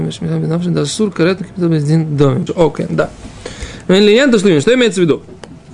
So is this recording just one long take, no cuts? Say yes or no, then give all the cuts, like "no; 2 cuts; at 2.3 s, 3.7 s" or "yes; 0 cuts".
no; 1 cut; at 2.5 s